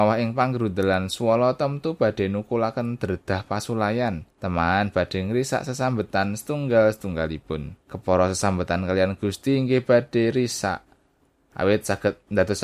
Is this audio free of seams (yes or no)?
no